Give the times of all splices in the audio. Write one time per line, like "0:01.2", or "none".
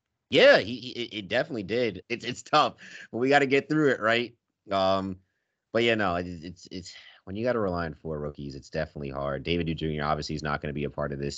0:02.0